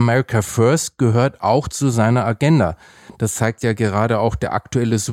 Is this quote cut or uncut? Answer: uncut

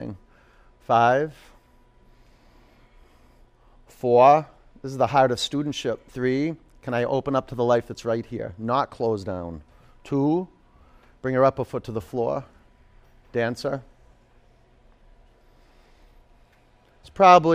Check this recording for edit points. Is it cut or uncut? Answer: uncut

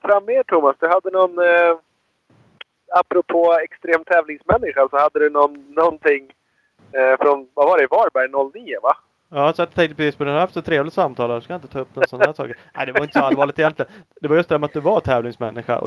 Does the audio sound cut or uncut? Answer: uncut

